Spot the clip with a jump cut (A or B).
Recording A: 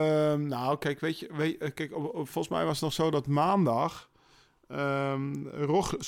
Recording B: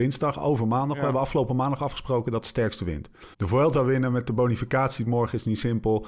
B